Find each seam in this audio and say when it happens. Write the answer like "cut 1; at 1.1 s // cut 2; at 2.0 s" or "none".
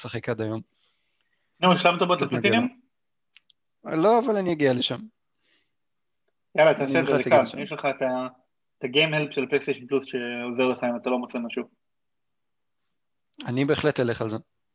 none